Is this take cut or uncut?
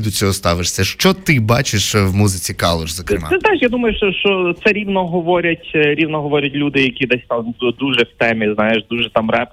uncut